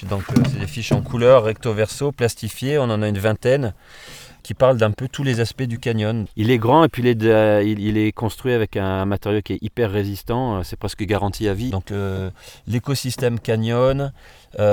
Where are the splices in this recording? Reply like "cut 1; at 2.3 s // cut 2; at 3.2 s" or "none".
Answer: cut 1; at 6.3 s // cut 2; at 11.7 s